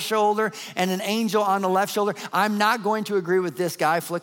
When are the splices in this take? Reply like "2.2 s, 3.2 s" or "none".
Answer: 2.3 s